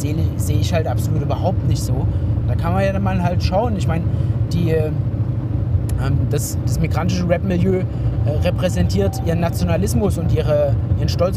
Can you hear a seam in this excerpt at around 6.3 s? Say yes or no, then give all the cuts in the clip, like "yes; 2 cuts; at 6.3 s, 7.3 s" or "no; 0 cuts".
no; 1 cut; at 2.4 s